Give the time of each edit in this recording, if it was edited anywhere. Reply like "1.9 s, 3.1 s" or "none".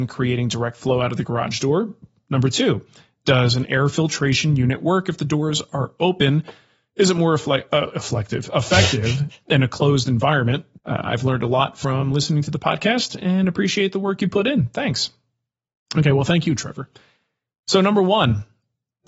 10.8 s